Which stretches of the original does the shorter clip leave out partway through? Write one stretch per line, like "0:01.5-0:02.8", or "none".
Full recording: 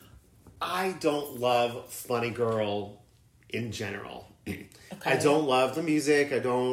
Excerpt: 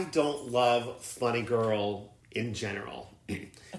0:03.1-0:03.4